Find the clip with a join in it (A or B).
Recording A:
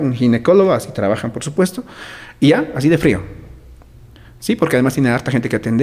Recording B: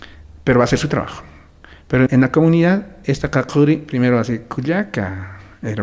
B